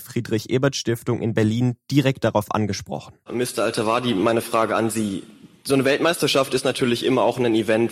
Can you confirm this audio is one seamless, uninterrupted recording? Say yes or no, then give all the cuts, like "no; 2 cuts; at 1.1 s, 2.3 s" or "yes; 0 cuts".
no; 1 cut; at 3.2 s